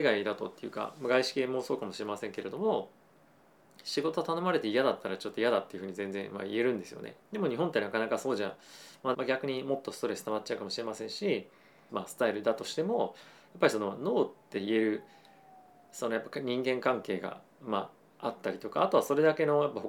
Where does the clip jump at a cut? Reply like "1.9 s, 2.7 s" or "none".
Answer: 7.2 s, 9.1 s, 11.9 s